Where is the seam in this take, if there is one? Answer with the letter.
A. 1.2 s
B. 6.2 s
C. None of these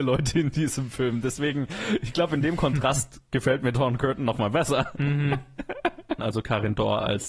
B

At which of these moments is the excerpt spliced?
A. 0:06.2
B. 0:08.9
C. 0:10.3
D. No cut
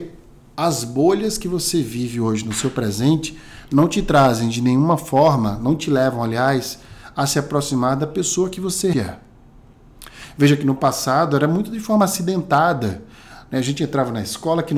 B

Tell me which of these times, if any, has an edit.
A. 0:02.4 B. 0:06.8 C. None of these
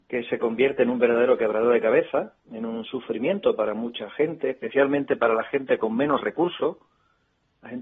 A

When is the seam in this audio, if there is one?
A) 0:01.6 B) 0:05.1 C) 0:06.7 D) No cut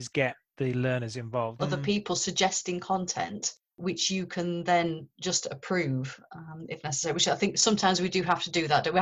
A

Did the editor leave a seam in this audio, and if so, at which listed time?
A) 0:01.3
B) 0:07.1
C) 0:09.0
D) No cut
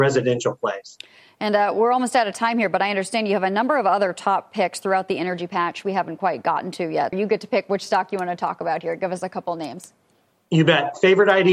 B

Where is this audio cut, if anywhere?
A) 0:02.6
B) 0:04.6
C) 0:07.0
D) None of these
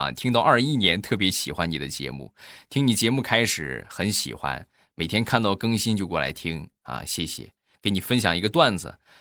D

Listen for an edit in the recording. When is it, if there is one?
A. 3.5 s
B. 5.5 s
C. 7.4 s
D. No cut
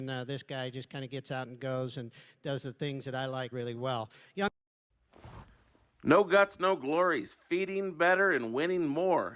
A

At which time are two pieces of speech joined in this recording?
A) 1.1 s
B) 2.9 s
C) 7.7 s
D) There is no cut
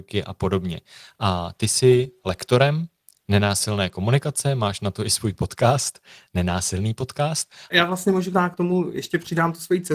C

